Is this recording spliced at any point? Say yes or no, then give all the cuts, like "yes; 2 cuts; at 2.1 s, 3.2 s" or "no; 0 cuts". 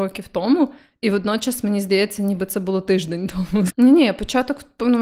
yes; 1 cut; at 3.7 s